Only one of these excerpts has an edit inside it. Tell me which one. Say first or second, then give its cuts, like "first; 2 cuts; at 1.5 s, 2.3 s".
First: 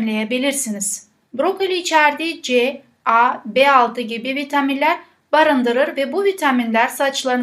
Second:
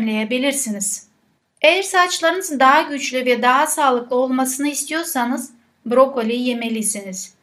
first; 1 cut; at 1.2 s